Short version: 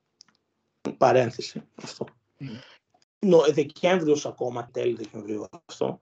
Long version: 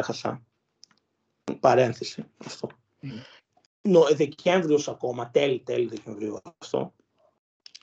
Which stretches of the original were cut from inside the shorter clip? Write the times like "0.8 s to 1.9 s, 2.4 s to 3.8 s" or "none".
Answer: 5.3 s to 5.6 s